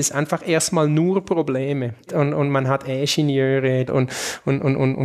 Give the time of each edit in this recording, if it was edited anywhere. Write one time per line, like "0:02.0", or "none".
0:02.1
0:03.9